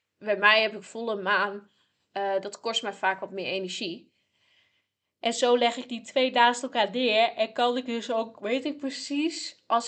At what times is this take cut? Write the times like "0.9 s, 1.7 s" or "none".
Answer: none